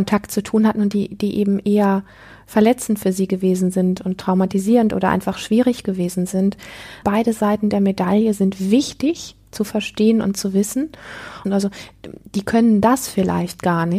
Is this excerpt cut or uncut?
cut